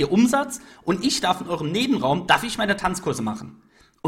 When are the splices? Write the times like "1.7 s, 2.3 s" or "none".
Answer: 2.3 s